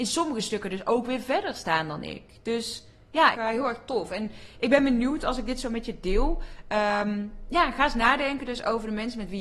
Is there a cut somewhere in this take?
yes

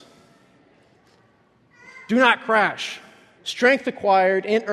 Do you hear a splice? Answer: yes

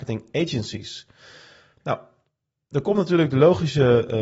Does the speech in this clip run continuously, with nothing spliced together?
yes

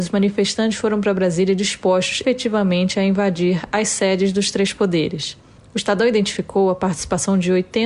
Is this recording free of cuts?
no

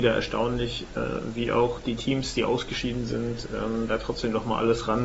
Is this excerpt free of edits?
yes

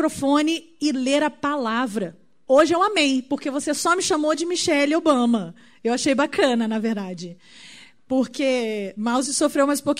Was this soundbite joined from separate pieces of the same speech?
yes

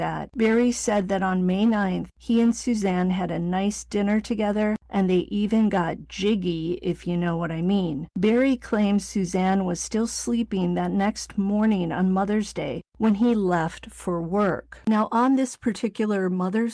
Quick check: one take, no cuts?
yes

